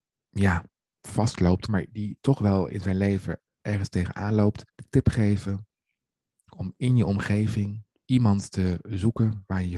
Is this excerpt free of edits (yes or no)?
no